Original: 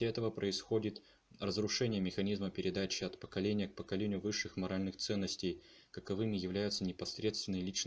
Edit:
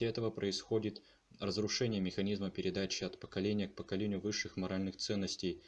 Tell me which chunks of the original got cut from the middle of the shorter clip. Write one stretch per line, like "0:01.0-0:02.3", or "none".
none